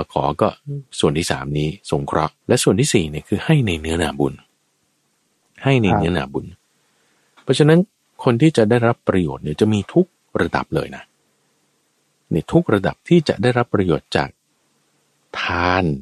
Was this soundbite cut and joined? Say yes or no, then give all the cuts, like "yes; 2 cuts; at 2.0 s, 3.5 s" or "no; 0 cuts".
yes; 1 cut; at 2.4 s